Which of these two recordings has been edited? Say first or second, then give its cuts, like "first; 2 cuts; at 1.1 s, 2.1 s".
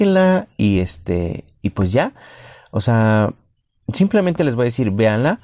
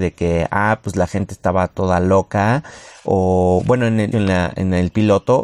second; 1 cut; at 4.1 s